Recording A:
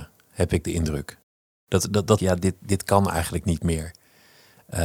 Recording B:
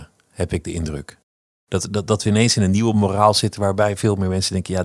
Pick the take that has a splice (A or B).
A